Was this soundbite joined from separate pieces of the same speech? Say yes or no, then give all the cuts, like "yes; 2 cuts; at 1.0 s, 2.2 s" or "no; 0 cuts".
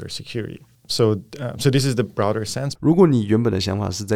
yes; 1 cut; at 2.7 s